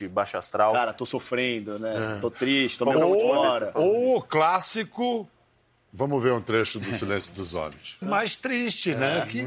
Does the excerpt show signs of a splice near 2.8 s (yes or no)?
no